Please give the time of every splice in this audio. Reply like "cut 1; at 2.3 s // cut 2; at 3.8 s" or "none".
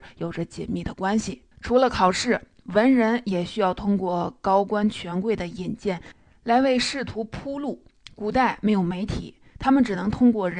cut 1; at 1.5 s